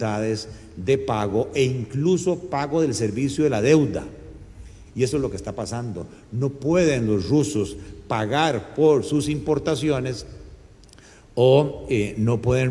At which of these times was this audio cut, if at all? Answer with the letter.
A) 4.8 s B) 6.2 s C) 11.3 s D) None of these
A